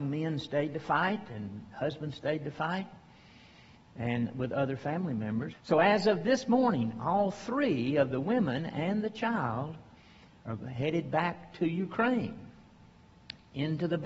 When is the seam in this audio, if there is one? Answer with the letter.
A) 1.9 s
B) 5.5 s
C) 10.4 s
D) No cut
B